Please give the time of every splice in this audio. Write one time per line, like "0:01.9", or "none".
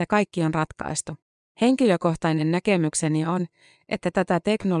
0:01.4